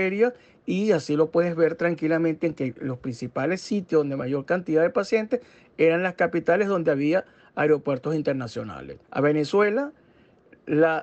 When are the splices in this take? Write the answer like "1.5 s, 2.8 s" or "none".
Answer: 9.0 s